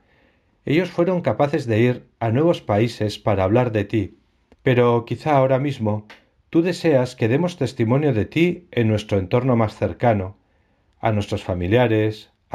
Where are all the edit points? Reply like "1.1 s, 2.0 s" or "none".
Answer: 4.5 s